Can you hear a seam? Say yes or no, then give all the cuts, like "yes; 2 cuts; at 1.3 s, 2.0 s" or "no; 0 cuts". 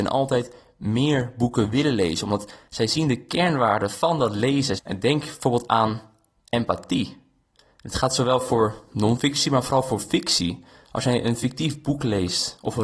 yes; 1 cut; at 4.8 s